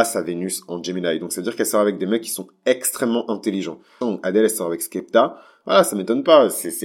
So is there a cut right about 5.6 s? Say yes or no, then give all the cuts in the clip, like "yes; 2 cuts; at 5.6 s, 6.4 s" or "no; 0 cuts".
no; 1 cut; at 4.0 s